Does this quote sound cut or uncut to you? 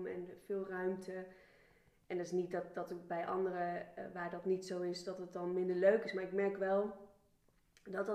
uncut